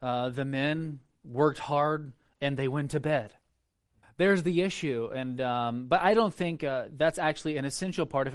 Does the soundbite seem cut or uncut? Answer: cut